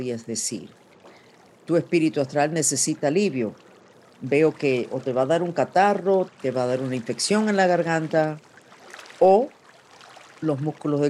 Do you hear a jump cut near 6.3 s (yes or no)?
yes